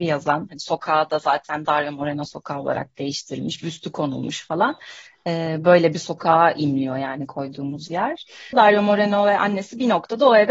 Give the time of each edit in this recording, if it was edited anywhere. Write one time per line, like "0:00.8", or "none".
0:08.5